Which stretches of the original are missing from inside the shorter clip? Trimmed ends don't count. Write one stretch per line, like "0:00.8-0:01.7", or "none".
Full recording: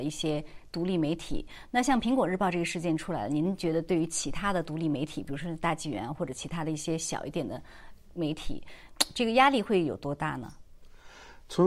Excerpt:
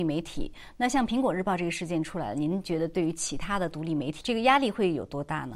0:05.1-0:09.1